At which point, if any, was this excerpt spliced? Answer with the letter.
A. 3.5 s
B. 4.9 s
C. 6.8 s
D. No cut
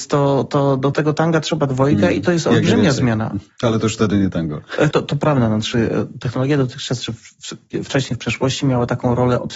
B